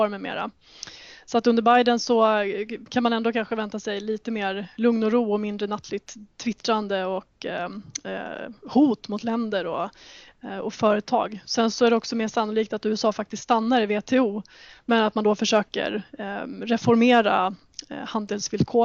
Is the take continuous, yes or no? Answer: yes